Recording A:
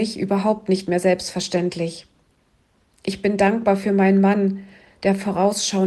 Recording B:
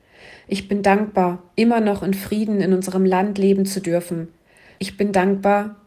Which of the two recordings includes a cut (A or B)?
B